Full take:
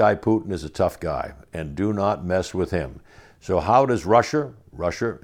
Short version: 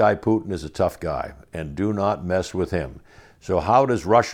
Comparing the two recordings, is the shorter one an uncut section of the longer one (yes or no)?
yes